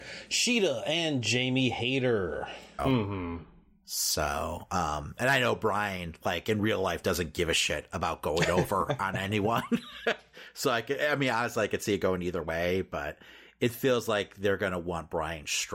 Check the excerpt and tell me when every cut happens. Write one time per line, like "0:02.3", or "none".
0:02.8